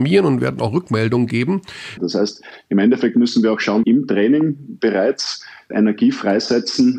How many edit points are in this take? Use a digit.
3